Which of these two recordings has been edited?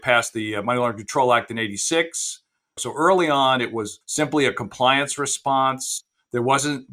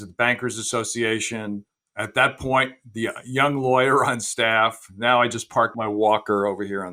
first; 1 cut; at 2.8 s

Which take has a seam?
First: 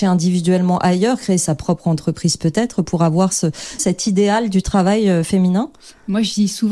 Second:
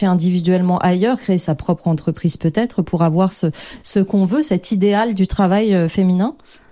first; 1 cut; at 3.8 s

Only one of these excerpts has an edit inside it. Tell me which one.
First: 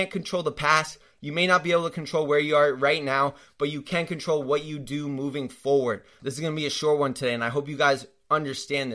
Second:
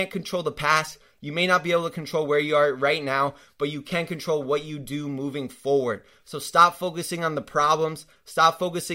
first; 1 cut; at 6.2 s

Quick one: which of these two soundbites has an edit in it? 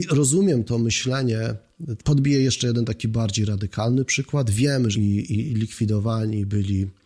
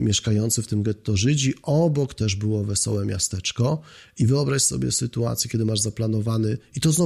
first; 2 cuts; at 2.0 s, 4.9 s

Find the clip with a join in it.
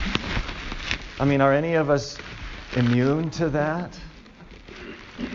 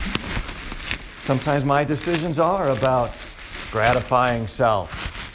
first; 1 cut; at 1.2 s

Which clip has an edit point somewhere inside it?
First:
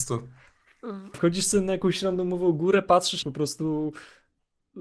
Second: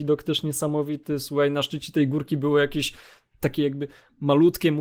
first; 2 cuts; at 1.1 s, 3.2 s

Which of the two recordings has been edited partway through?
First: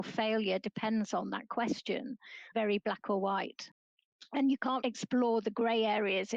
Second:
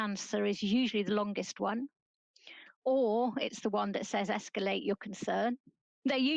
first; 2 cuts; at 2.5 s, 4.8 s

